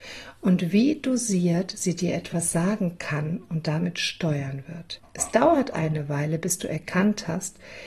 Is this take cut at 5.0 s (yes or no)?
yes